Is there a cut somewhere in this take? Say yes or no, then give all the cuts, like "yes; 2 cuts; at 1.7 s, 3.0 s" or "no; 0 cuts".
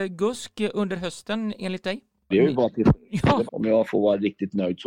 yes; 2 cuts; at 2.3 s, 3.5 s